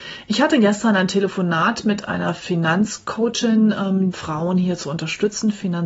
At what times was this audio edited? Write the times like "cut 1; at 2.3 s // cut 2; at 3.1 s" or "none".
cut 1; at 4.1 s